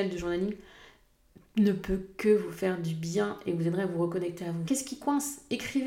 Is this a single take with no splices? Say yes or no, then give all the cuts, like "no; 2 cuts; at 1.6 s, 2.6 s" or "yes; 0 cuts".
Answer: no; 1 cut; at 4.7 s